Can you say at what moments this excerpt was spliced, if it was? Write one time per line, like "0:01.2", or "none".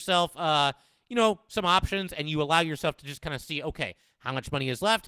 none